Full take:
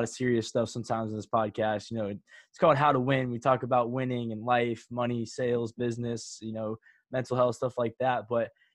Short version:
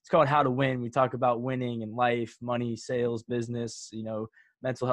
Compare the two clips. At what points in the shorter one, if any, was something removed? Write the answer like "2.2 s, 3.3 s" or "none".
none